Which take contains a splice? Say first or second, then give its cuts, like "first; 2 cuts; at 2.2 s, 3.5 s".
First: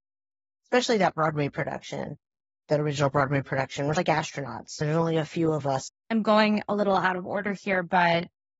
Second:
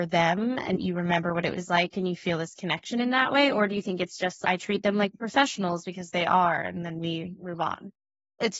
first; 1 cut; at 5.9 s